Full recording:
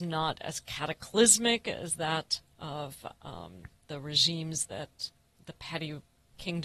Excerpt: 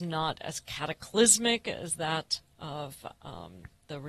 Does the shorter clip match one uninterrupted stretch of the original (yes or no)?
yes